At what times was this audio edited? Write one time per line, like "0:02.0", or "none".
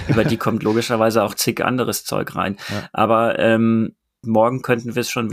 0:04.2